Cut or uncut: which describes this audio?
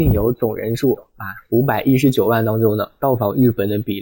uncut